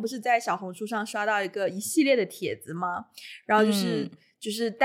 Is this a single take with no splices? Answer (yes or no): yes